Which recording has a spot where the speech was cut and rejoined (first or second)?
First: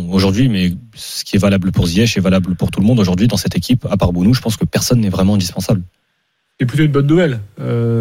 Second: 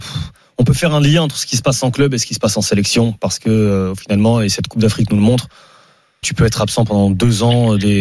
second